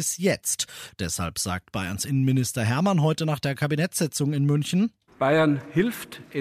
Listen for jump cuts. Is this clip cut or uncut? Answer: uncut